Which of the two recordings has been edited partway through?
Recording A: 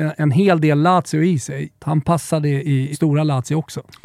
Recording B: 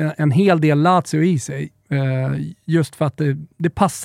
A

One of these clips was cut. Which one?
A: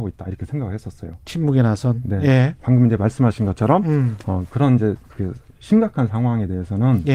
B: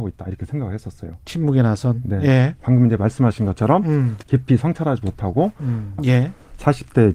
B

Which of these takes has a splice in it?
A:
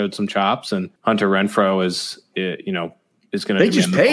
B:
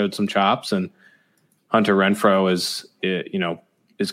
A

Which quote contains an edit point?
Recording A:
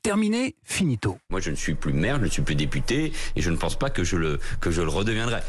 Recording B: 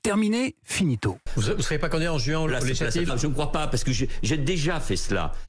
B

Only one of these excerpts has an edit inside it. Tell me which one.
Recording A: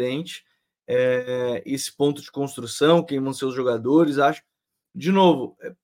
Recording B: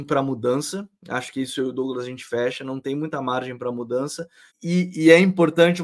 B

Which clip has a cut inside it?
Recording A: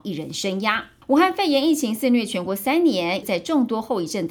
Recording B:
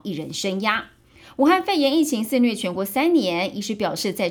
A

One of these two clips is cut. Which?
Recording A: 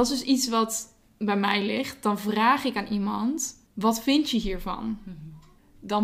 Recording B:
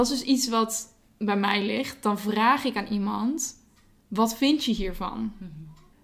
A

